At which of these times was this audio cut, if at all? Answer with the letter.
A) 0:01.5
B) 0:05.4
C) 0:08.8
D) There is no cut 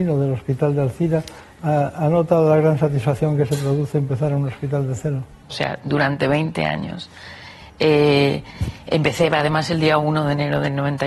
B